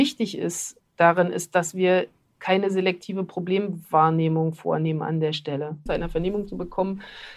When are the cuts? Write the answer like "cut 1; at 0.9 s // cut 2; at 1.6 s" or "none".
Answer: cut 1; at 5.9 s